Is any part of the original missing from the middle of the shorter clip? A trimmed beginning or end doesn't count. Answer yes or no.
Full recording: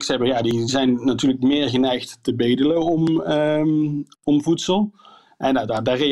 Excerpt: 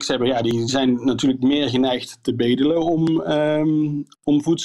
no